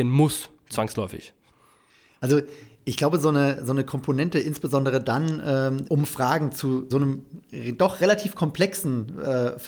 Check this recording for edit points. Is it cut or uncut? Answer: cut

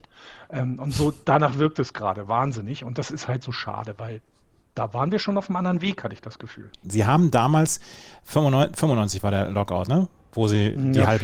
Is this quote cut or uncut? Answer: cut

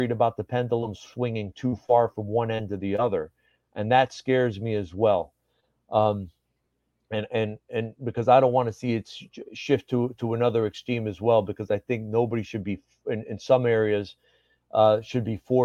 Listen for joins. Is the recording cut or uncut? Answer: uncut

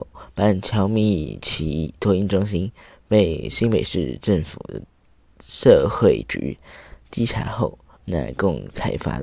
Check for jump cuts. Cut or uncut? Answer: cut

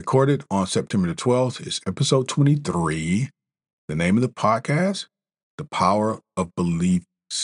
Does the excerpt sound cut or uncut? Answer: uncut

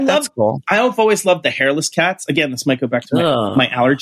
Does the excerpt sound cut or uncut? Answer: uncut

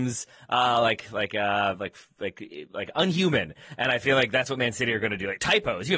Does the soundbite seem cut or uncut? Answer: uncut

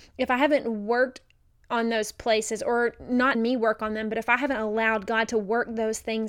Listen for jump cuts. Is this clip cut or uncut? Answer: cut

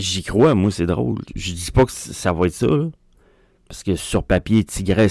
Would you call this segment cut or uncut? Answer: uncut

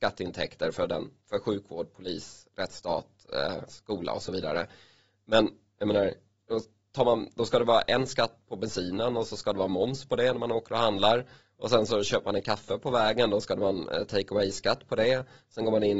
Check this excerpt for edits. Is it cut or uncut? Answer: uncut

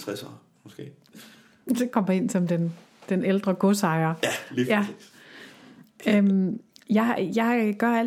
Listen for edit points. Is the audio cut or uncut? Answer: uncut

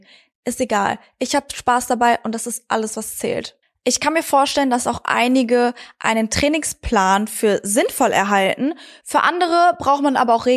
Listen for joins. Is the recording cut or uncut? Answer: uncut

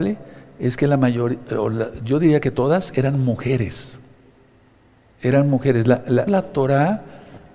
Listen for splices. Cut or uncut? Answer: cut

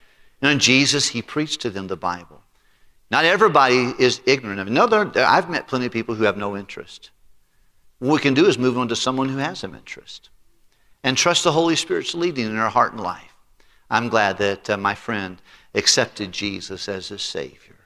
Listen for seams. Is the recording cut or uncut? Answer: uncut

